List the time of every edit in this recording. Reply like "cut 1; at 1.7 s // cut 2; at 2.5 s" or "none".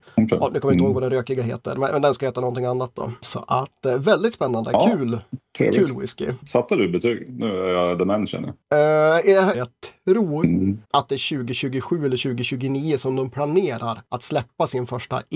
cut 1; at 9.5 s // cut 2; at 10.8 s